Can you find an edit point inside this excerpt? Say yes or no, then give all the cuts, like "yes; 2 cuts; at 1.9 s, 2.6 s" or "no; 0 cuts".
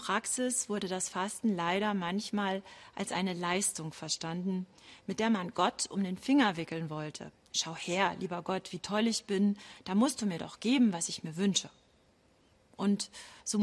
no; 0 cuts